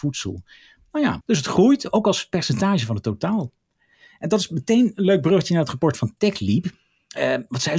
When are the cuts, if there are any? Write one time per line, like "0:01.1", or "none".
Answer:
none

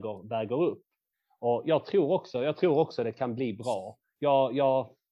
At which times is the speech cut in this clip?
none

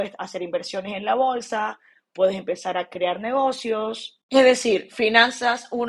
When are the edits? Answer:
none

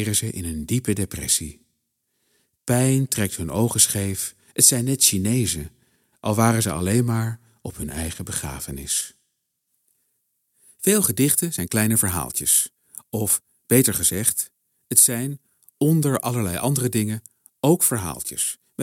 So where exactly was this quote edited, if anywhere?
none

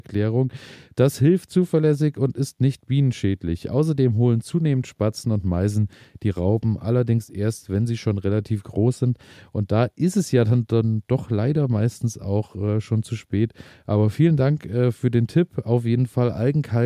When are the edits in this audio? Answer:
none

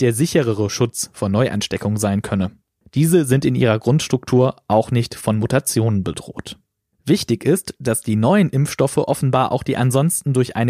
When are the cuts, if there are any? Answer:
0:02.8

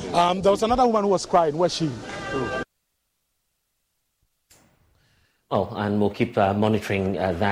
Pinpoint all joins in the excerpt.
none

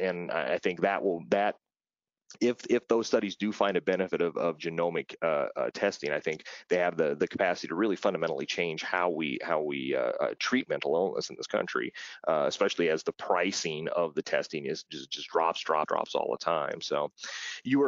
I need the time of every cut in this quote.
0:15.9

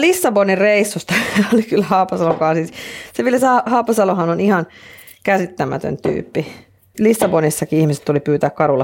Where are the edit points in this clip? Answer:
0:06.9

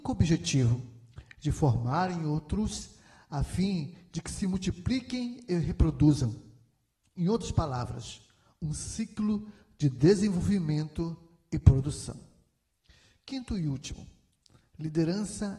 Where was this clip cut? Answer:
none

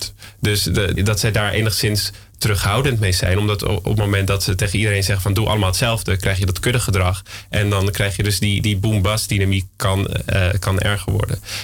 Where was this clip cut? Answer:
0:01.0

